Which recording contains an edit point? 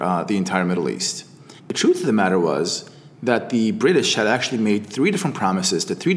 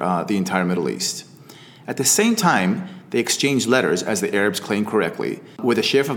first; 1 cut; at 1.6 s

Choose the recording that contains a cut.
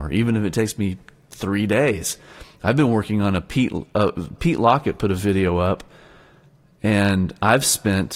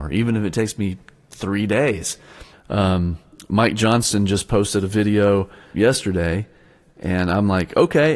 second; 2 cuts; at 2.5 s, 5.7 s

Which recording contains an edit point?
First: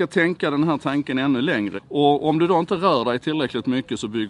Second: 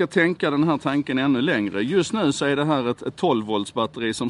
first; 1 cut; at 1.8 s

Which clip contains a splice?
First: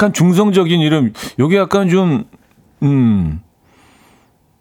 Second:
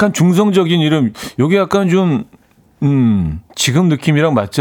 second; 1 cut; at 3.5 s

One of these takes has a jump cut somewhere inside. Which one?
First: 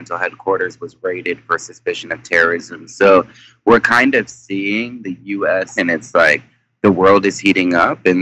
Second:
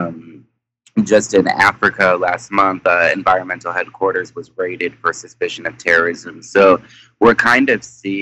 first; 1 cut; at 5.8 s

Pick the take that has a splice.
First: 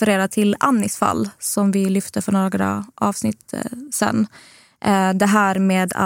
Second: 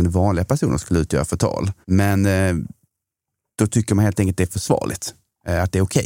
second; 1 cut; at 1.8 s

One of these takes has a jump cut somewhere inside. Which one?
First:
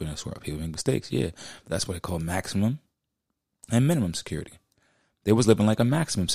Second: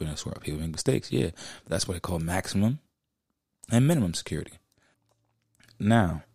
second; 1 cut; at 4.9 s

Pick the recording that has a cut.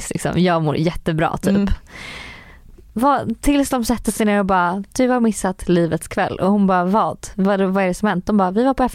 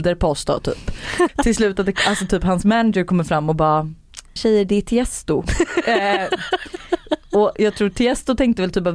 second; 2 cuts; at 1.3 s, 4.4 s

